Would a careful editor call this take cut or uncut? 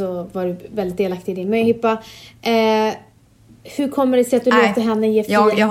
uncut